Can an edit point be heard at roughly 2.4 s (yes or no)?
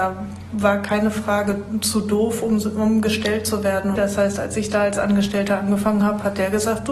no